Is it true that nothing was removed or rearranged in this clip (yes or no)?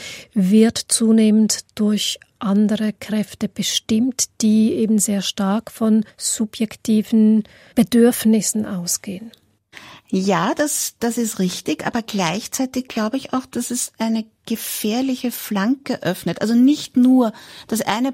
yes